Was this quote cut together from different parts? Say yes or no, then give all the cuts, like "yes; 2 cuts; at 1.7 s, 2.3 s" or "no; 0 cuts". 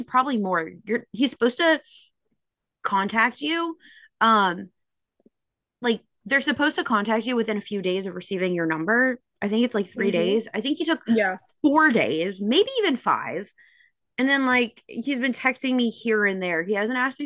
no; 0 cuts